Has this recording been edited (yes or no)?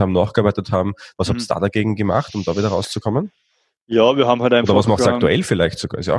no